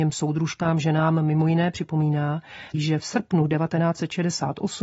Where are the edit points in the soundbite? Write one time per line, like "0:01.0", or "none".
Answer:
0:02.7

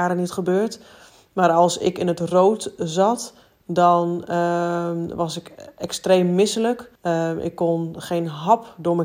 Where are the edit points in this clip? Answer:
0:06.9

